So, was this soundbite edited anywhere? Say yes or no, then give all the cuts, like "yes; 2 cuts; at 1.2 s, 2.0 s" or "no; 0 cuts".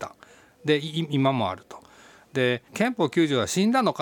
yes; 1 cut; at 2.7 s